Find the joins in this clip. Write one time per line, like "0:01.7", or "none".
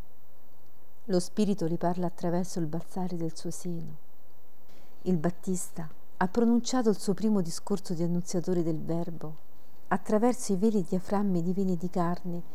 none